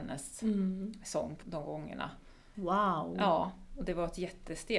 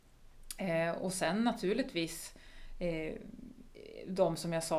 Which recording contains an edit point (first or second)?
first